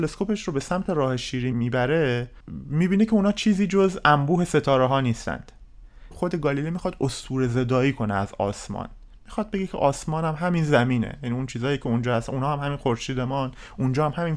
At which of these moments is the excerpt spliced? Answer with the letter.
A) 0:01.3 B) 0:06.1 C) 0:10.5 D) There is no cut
B